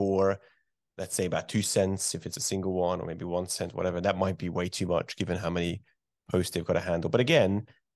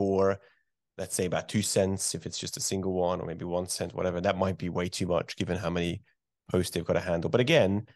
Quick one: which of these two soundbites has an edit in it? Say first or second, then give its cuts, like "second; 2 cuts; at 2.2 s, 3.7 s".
first; 1 cut; at 2.3 s